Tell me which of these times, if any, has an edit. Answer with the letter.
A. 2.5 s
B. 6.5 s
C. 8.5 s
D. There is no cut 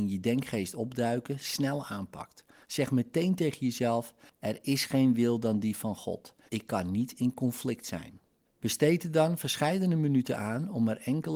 B